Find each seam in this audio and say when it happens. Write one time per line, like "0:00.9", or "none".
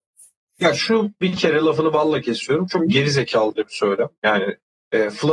none